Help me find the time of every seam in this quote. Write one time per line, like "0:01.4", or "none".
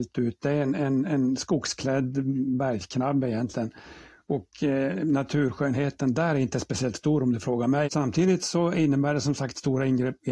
0:07.8